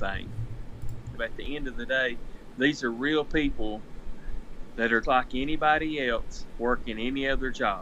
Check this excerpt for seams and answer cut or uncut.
cut